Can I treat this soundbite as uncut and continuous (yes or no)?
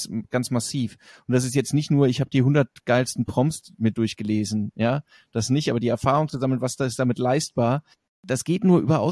yes